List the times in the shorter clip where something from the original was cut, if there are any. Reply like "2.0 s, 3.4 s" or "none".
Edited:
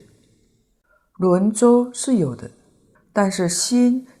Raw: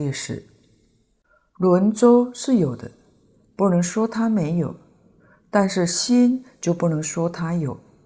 2.9 s